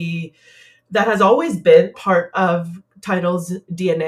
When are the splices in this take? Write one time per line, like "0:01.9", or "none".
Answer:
0:01.9